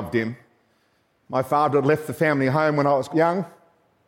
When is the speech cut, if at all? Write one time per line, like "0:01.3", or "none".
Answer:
0:03.1